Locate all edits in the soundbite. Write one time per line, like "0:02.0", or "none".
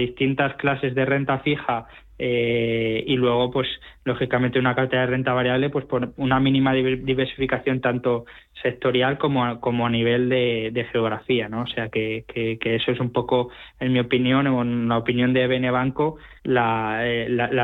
0:16.4